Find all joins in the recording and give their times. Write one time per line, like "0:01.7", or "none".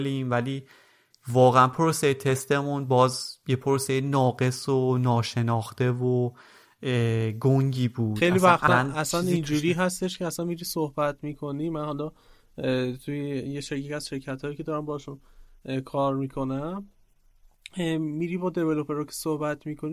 0:08.7